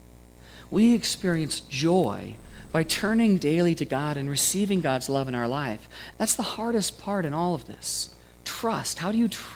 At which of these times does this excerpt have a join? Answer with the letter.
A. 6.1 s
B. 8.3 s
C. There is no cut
A